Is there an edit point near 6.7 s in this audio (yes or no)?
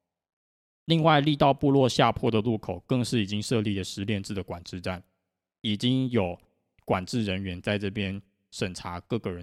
no